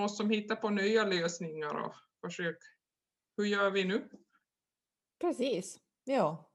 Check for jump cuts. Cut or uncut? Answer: uncut